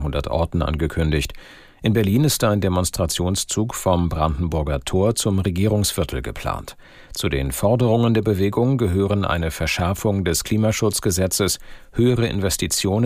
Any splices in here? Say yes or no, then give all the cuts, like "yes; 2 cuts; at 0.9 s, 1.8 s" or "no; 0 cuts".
no; 0 cuts